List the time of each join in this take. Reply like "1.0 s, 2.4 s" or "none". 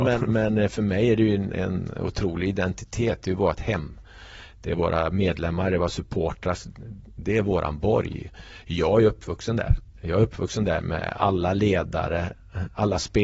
none